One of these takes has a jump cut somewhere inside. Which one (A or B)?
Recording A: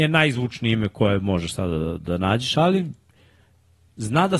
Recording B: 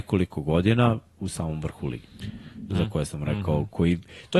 B